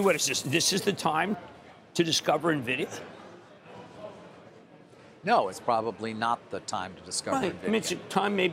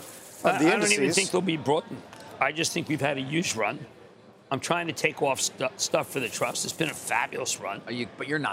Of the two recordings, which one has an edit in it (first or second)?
first